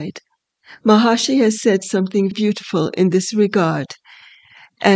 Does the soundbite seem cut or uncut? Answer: cut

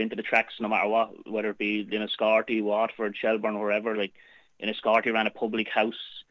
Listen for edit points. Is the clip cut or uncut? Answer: cut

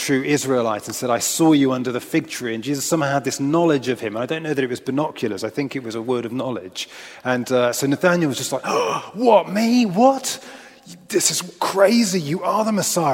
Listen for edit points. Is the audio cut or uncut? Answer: uncut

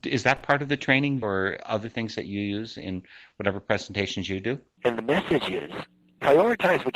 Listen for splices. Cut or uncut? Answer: cut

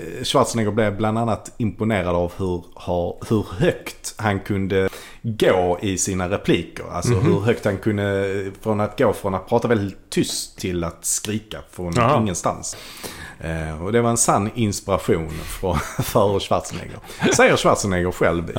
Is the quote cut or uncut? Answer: uncut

